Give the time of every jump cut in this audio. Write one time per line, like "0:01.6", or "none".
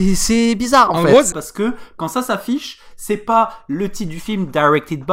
0:01.3